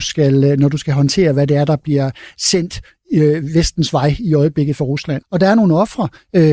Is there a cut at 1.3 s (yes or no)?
no